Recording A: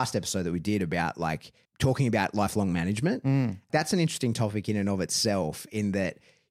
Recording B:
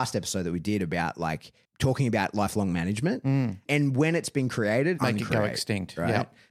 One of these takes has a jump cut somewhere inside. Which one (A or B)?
B